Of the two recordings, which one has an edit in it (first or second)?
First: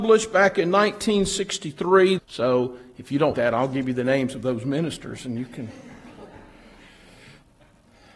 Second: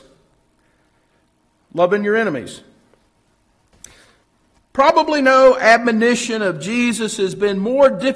first